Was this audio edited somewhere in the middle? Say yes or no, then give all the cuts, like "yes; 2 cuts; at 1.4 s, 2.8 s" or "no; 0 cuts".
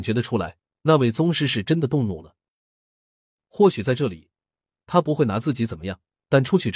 no; 0 cuts